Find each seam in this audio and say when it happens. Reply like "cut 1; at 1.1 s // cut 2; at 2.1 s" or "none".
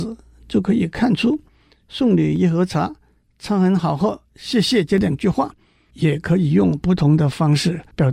none